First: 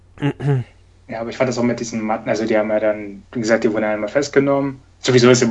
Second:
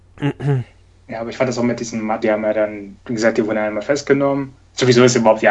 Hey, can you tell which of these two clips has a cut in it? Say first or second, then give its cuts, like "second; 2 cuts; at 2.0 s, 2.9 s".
second; 1 cut; at 2.2 s